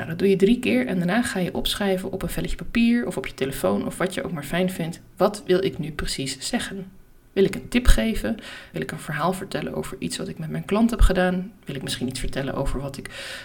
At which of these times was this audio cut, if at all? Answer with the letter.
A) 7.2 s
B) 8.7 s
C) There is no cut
B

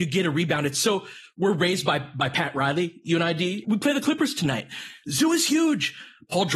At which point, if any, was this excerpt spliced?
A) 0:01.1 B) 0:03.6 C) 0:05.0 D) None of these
B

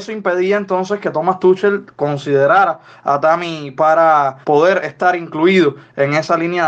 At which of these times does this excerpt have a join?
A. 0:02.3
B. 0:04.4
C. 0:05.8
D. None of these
B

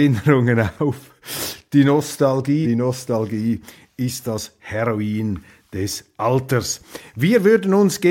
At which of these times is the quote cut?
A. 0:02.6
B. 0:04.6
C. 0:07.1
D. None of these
A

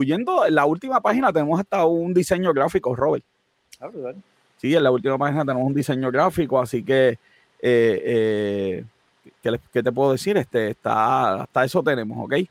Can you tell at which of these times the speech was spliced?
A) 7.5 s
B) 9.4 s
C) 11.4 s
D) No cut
C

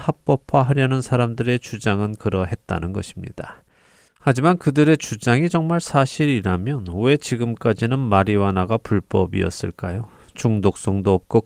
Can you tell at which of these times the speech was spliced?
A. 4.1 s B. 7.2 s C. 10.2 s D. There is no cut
D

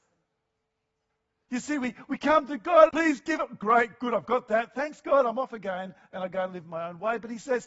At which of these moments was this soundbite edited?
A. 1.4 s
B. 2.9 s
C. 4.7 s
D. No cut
B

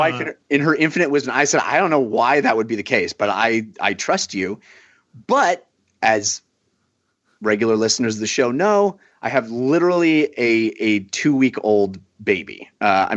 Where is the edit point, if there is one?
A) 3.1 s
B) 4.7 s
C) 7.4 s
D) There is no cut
D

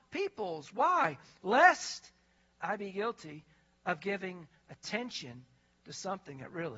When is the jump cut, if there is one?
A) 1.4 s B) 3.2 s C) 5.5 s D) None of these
A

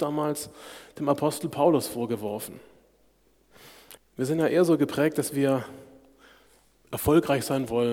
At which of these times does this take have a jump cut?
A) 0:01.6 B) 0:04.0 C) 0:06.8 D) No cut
B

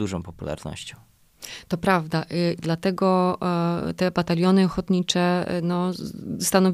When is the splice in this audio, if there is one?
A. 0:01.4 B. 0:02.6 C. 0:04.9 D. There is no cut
B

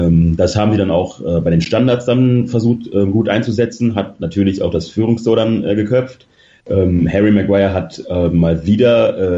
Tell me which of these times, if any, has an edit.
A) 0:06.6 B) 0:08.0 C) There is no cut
A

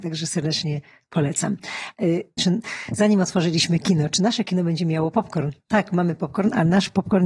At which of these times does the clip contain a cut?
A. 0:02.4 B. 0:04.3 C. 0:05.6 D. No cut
A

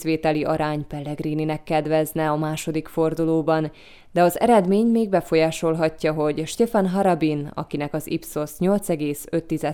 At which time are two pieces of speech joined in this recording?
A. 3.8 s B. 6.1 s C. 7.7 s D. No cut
D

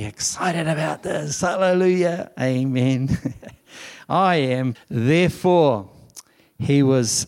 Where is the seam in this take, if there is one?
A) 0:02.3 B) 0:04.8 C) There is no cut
B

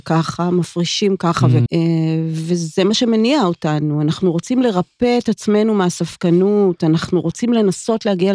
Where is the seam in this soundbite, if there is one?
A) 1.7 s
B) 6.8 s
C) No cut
A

